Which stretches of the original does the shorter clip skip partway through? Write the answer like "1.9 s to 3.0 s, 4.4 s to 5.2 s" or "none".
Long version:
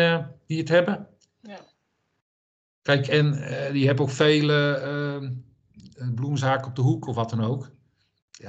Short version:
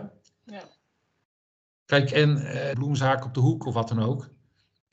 3.7 s to 6.1 s